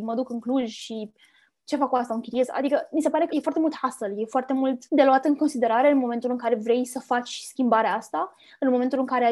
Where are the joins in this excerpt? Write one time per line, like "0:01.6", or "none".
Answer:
0:03.3
0:04.9